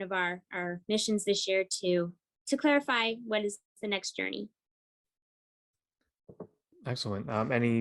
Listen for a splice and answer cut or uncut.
uncut